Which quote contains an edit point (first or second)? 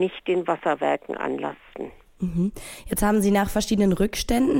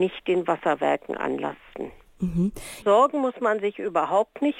second